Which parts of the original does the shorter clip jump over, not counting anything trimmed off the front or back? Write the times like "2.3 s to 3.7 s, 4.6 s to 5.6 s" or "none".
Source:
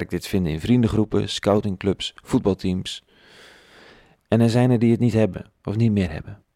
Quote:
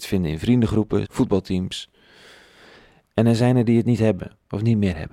1.3 s to 2.2 s